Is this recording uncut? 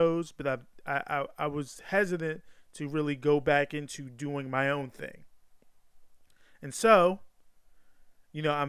yes; 0 cuts

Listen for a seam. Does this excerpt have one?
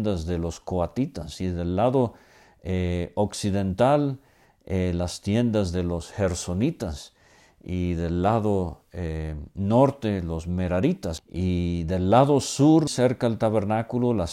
yes; 2 cuts; at 11.2 s, 12.9 s

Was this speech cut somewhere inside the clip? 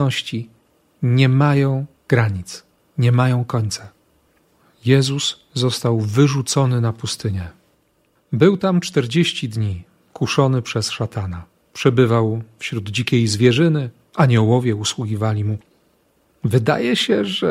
no; 0 cuts

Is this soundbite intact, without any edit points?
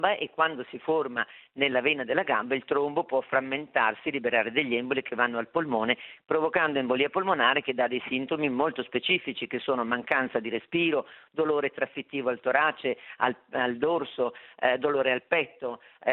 yes; 0 cuts

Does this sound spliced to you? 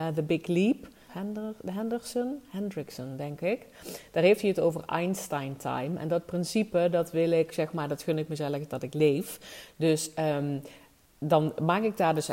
yes; 1 cut; at 1.1 s

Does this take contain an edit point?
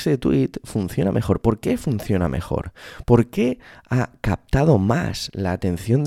no; 0 cuts

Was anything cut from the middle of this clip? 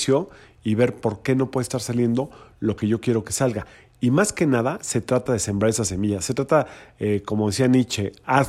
no; 0 cuts

